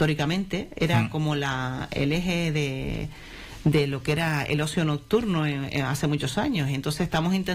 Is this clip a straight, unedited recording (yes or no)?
yes